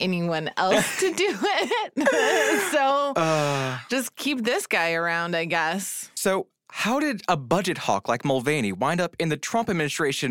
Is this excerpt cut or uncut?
uncut